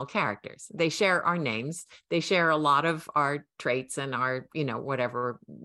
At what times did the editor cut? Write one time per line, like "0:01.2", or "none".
none